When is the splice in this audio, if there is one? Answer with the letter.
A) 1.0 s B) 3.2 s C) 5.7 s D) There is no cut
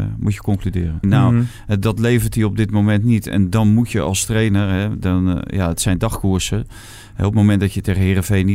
A